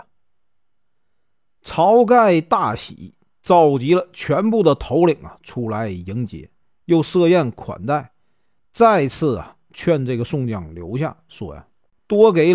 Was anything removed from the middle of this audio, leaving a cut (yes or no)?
no